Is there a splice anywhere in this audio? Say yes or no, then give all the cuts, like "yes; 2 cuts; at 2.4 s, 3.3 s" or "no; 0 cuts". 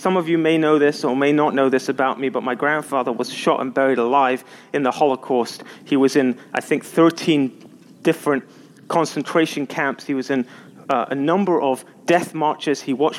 no; 0 cuts